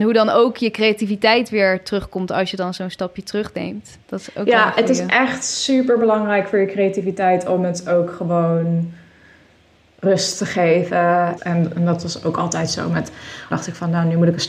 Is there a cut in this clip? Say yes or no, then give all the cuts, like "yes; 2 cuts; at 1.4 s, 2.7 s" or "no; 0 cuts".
yes; 3 cuts; at 4.0 s, 11.4 s, 13.5 s